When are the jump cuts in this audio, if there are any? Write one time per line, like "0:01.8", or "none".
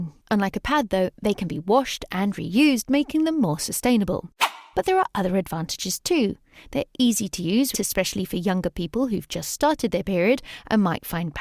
0:07.7

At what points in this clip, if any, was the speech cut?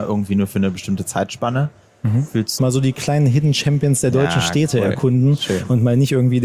0:02.6

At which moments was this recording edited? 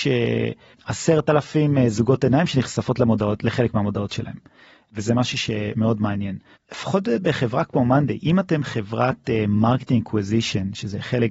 0:06.6

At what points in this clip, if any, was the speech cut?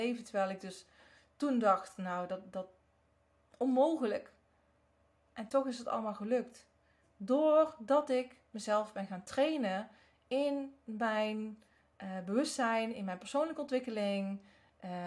none

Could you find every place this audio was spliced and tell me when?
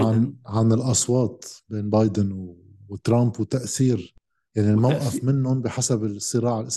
none

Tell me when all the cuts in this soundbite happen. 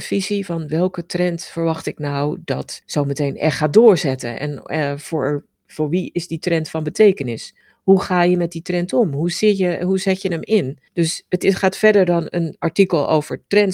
none

